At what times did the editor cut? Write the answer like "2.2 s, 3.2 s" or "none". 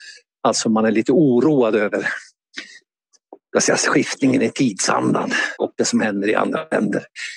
5.6 s